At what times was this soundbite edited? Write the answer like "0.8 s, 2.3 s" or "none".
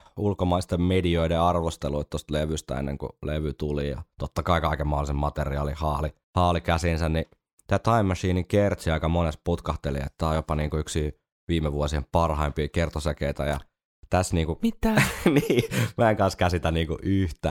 none